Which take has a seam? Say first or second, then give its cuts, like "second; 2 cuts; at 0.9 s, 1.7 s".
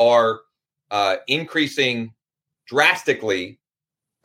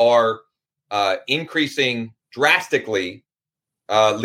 second; 1 cut; at 2.2 s